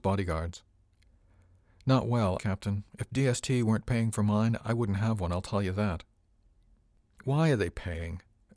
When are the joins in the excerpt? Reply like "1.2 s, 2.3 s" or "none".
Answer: 2.4 s